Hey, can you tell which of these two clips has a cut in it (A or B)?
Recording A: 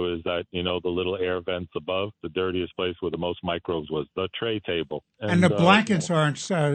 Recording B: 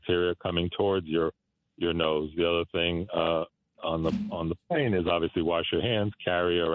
A